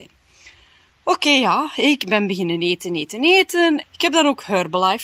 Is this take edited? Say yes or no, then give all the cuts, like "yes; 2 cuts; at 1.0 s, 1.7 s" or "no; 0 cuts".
yes; 1 cut; at 3.8 s